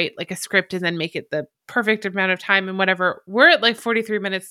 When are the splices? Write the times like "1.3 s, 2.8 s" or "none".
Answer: 1.5 s